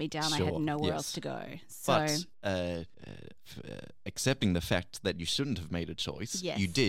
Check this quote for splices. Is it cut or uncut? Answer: uncut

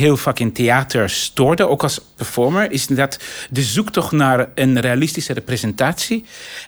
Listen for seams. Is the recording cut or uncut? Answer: uncut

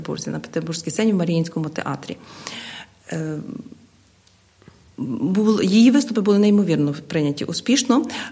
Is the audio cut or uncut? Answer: uncut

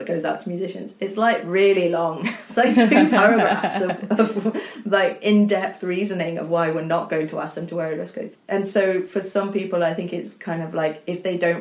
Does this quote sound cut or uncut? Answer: uncut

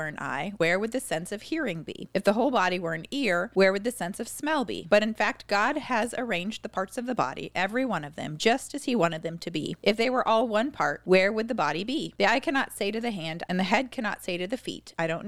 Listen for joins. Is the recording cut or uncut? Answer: cut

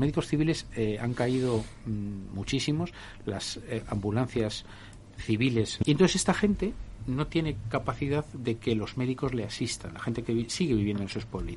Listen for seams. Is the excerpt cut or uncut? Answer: cut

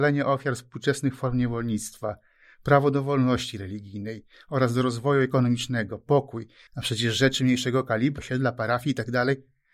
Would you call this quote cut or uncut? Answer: cut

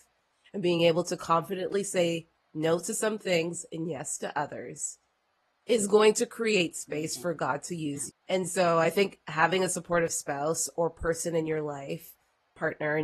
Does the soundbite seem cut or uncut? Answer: cut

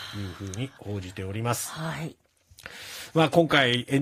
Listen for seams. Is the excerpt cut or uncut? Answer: uncut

